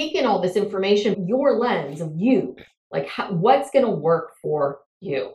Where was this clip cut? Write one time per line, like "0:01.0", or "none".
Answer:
0:01.1

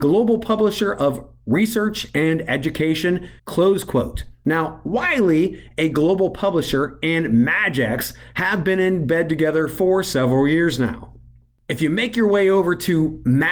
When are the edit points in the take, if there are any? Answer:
0:03.4

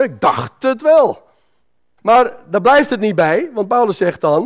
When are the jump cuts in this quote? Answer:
0:02.0

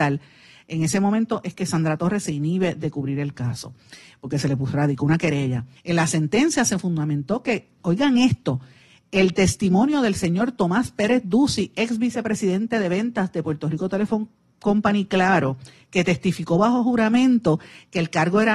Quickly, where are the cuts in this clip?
0:05.8

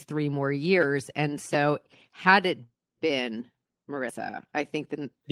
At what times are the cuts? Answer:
none

